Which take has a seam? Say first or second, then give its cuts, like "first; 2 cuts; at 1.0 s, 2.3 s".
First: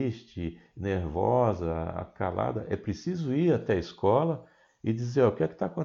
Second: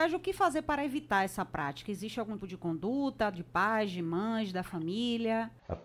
second; 1 cut; at 2.4 s